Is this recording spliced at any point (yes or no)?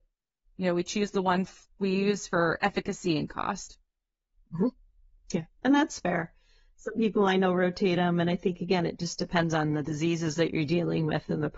no